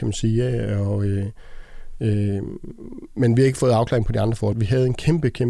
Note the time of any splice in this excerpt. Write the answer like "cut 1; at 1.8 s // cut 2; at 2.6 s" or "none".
cut 1; at 4.5 s

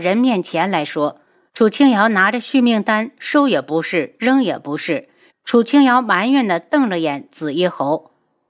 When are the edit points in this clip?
cut 1; at 1.5 s // cut 2; at 5.3 s

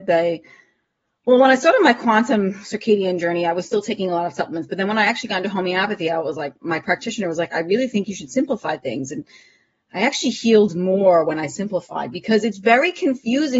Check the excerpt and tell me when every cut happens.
none

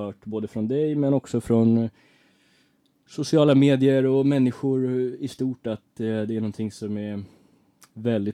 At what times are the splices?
none

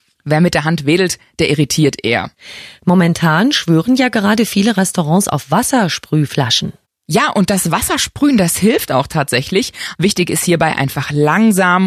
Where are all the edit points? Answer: cut 1; at 9.9 s

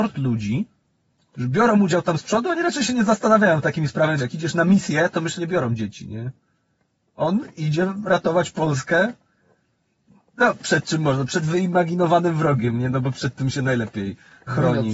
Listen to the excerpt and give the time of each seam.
cut 1; at 4.2 s // cut 2; at 5.4 s

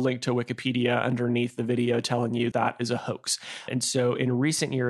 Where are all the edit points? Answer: cut 1; at 2.5 s // cut 2; at 3.7 s

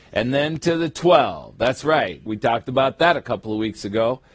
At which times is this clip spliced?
cut 1; at 2.3 s

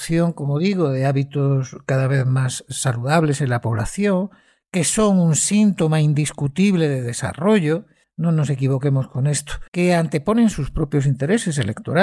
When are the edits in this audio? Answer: cut 1; at 8.0 s // cut 2; at 9.7 s

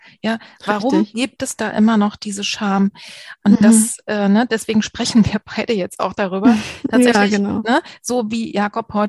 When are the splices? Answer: none

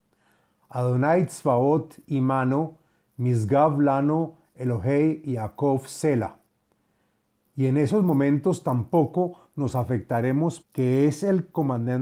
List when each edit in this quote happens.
cut 1; at 10.6 s

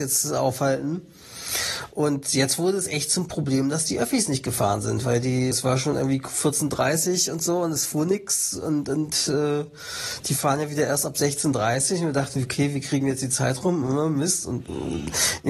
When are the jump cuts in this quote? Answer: cut 1; at 5.5 s

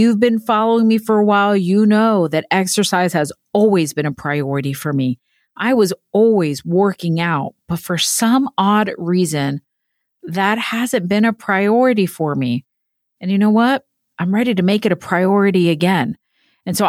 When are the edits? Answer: none

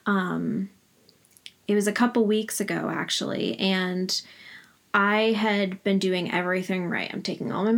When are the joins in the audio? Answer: none

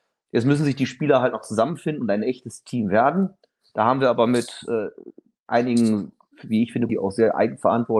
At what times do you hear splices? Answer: cut 1; at 6.9 s

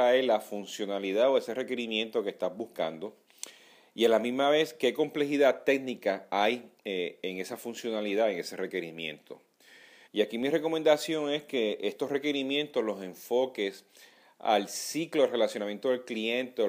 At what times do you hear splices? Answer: cut 1; at 10.0 s

